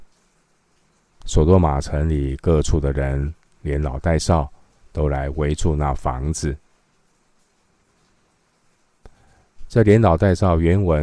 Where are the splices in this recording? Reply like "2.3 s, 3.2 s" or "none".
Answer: 1.2 s, 9.7 s